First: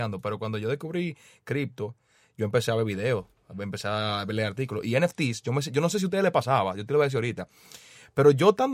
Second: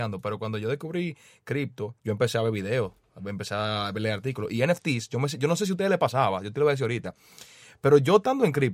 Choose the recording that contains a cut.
second; 1 cut; at 2.0 s

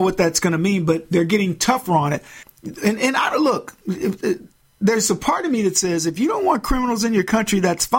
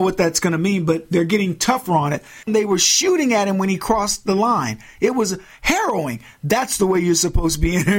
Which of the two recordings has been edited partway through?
second; 1 cut; at 2.5 s

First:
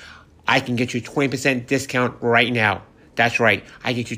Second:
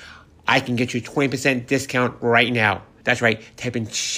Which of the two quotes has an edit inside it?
second; 1 cut; at 3.0 s

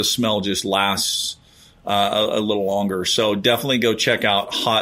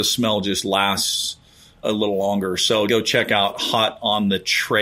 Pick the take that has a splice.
second; 2 cuts; at 1.8 s, 2.9 s

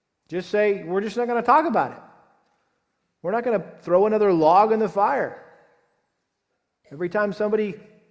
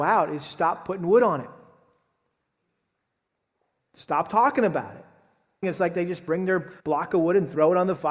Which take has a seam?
second; 2 cuts; at 5.6 s, 6.8 s

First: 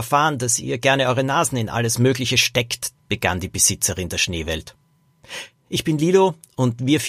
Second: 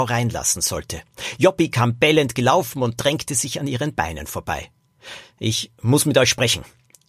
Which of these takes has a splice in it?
first; 1 cut; at 3.0 s

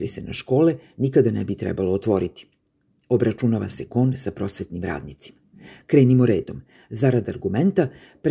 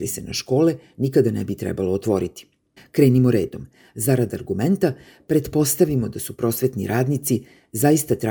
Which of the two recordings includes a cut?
second; 1 cut; at 2.8 s

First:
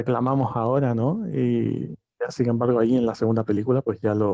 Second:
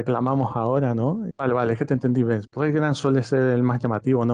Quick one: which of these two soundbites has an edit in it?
second; 2 cuts; at 1.3 s, 2.5 s

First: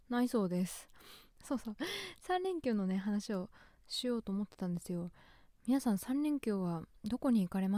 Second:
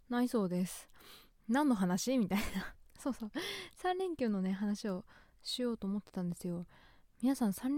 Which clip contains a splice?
first; 1 cut; at 1.4 s

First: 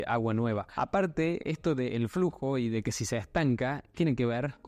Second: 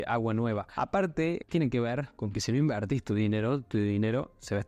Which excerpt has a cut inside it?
second; 1 cut; at 1.4 s

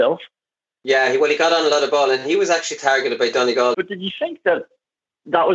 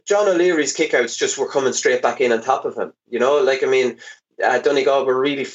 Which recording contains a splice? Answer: first; 1 cut; at 3.7 s

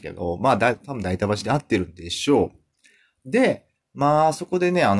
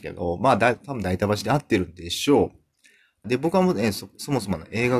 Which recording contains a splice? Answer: second; 1 cut; at 3.2 s

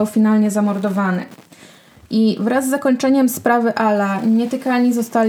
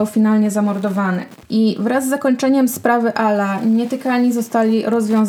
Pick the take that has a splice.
second; 1 cut; at 1.4 s

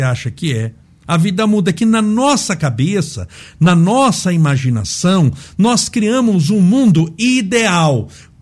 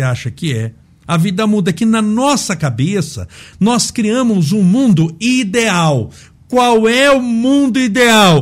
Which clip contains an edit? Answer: second; 1 cut; at 3.5 s

